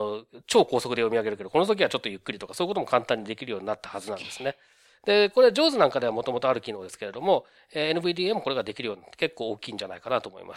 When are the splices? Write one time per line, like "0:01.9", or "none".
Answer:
none